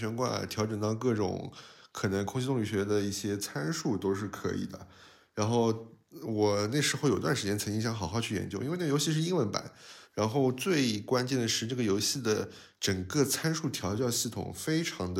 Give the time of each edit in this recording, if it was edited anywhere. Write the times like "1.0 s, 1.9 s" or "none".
10.0 s